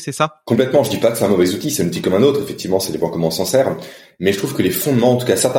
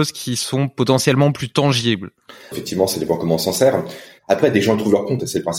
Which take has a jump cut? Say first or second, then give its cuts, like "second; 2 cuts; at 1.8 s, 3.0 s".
second; 2 cuts; at 2.5 s, 4.2 s